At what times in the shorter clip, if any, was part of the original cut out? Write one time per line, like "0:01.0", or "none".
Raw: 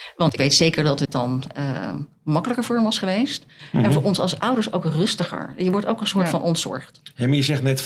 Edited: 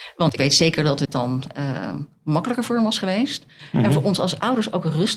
none